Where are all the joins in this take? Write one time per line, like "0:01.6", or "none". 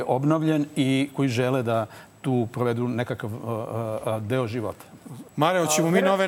0:05.3